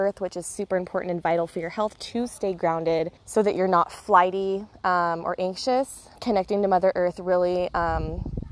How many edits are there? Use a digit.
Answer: 2